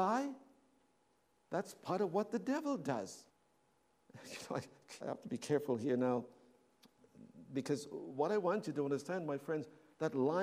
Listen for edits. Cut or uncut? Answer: cut